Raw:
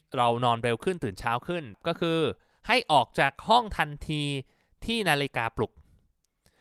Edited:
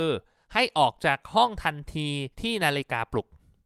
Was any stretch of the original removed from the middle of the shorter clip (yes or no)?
yes